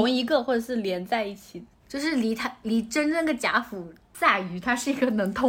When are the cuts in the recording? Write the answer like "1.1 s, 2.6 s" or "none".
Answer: 4.1 s